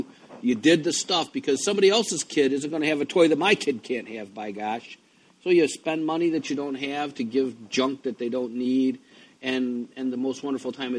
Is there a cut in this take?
no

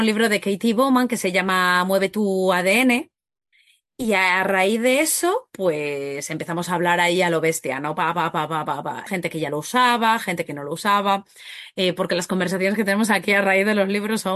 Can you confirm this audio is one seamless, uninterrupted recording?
no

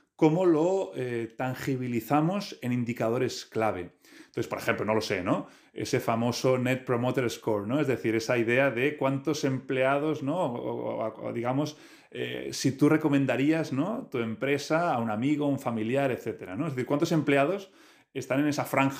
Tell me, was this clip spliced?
no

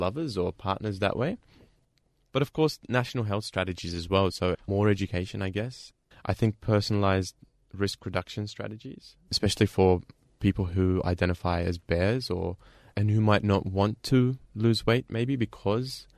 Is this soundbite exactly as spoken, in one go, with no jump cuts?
no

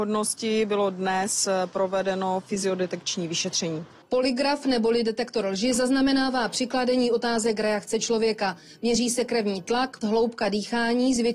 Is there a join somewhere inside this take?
yes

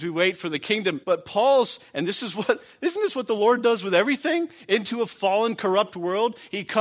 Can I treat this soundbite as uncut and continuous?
no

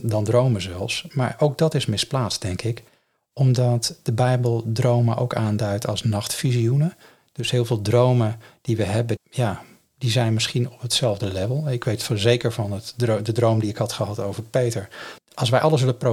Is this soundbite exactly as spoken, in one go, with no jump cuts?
no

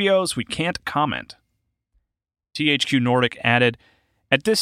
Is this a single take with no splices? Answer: yes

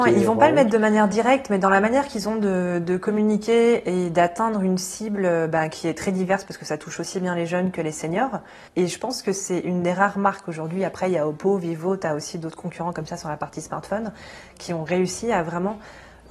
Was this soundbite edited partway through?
yes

